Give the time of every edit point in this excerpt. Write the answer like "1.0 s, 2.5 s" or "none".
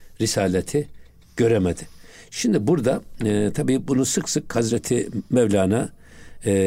none